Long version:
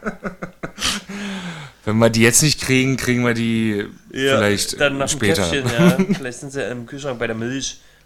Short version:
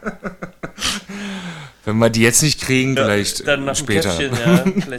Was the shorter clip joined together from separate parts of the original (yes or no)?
yes